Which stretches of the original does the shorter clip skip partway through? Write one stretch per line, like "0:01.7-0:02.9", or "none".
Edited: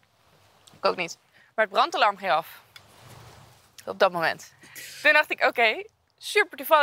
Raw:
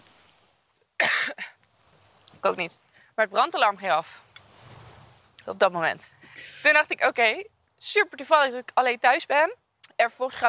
none